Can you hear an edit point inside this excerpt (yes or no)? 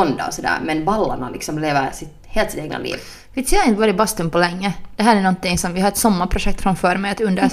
no